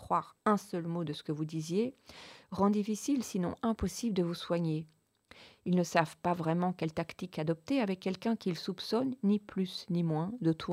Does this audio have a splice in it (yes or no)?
no